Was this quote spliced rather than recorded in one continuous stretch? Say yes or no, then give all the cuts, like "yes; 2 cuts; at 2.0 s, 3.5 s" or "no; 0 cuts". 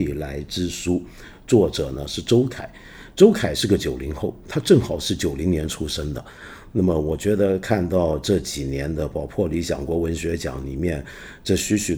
yes; 1 cut; at 6.7 s